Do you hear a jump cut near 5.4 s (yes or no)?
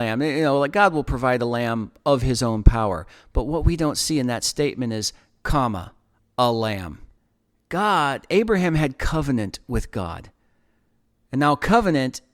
yes